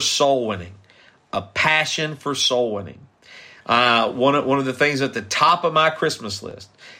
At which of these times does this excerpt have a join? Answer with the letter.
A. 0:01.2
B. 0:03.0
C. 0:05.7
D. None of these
D